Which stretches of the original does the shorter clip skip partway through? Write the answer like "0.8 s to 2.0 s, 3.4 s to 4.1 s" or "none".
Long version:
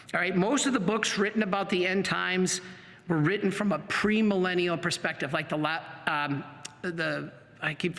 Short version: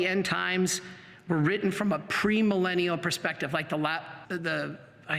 6.0 s to 6.8 s